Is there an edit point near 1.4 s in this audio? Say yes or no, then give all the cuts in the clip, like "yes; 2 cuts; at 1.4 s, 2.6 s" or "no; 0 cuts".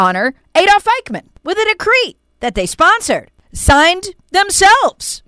yes; 1 cut; at 1.4 s